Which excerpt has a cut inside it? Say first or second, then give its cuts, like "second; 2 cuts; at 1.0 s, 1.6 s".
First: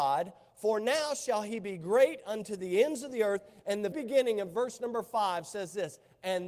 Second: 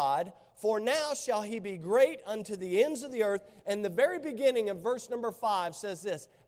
first; 1 cut; at 3.9 s